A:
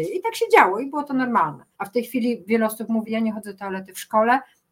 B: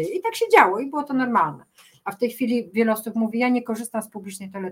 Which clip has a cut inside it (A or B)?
A